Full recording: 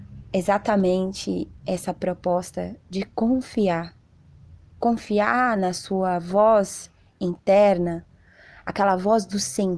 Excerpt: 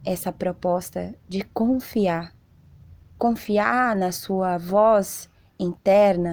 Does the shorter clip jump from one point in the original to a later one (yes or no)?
no